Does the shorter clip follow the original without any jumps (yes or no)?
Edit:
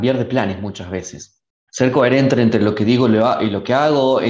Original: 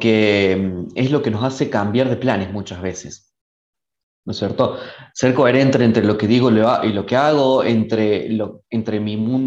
no